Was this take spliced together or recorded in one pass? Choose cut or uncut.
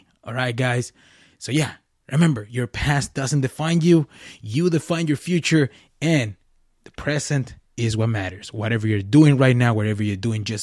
uncut